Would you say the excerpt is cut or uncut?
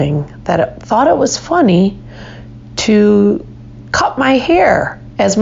uncut